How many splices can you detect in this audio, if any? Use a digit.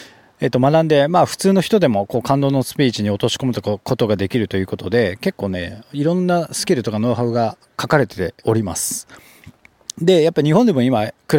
1